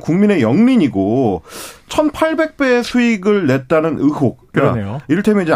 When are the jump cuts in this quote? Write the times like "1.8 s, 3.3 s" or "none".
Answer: 4.5 s